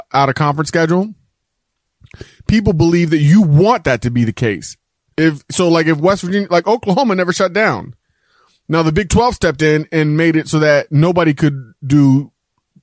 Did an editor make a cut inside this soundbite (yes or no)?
yes